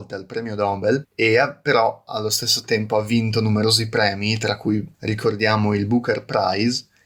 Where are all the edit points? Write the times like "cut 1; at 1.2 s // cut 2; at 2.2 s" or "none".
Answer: cut 1; at 1.0 s // cut 2; at 4.9 s